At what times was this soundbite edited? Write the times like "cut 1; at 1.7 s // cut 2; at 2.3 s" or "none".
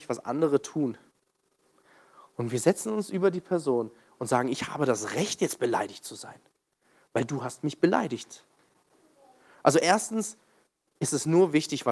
none